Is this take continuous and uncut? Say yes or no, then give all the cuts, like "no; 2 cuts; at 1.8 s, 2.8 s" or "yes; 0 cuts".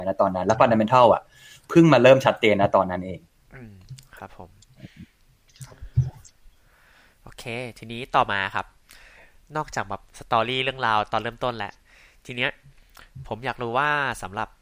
yes; 0 cuts